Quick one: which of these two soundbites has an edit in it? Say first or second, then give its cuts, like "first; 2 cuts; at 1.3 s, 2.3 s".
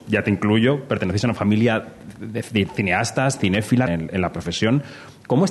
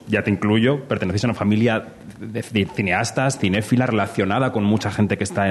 first; 1 cut; at 3.9 s